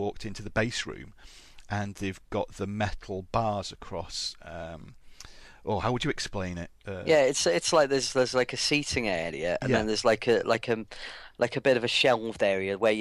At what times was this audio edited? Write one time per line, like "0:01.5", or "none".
none